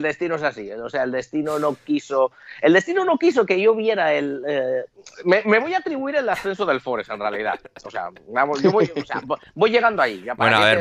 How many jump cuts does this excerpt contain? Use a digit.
0